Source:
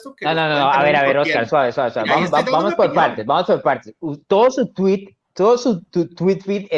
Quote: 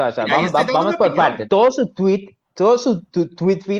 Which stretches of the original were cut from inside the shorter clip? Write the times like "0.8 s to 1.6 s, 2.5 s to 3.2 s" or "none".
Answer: 3.2 s to 4.2 s